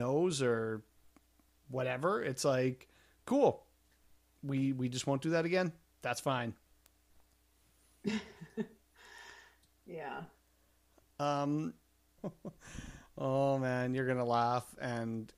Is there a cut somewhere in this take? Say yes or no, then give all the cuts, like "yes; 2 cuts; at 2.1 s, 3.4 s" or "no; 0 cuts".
yes; 1 cut; at 12.2 s